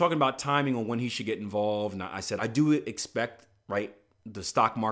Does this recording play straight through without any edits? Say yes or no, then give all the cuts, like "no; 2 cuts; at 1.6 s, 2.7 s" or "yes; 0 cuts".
no; 1 cut; at 2.4 s